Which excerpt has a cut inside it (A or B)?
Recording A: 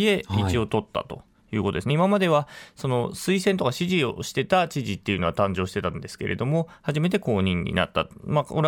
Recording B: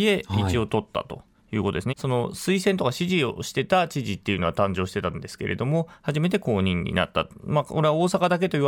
B